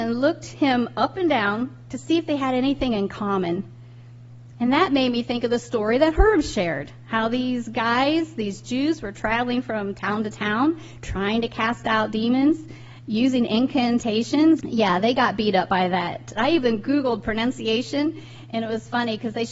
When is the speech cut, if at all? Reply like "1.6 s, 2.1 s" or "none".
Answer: 14.6 s, 16.4 s